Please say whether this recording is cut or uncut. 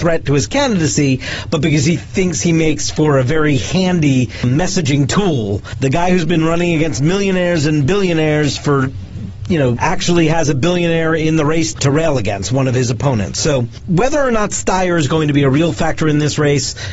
cut